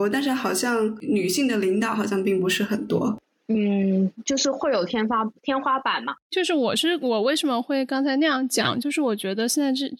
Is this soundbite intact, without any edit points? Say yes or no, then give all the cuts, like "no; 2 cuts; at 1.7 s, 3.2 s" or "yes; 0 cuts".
yes; 0 cuts